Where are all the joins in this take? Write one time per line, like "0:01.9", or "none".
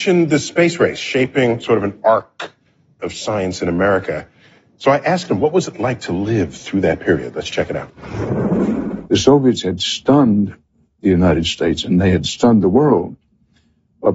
none